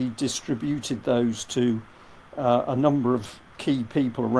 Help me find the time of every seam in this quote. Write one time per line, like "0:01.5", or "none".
none